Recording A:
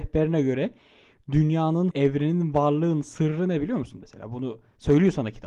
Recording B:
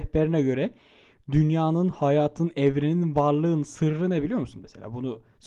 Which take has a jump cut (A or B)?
A